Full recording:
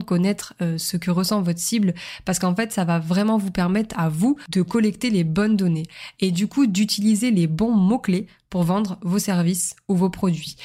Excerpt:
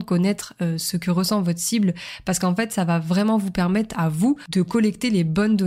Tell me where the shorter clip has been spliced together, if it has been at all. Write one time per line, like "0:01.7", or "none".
none